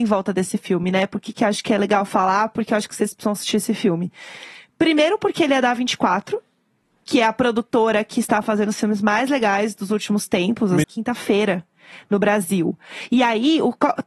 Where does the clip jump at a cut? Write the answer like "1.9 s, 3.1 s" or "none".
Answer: 10.8 s